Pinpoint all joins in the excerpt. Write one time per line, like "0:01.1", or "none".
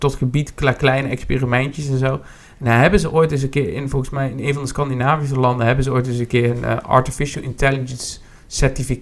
none